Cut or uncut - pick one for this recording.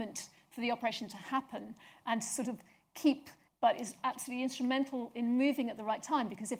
cut